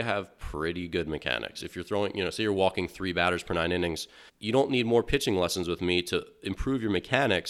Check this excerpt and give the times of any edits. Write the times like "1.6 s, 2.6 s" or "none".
1.6 s, 4.3 s